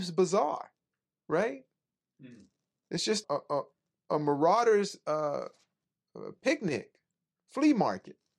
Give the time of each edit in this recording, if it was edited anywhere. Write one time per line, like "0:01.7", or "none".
0:03.2